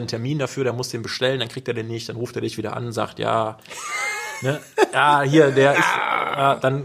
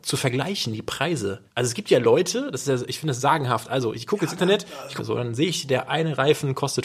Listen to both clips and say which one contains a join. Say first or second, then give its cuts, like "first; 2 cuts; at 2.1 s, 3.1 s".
second; 2 cuts; at 1.5 s, 5.0 s